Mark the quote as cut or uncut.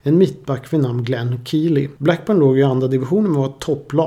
uncut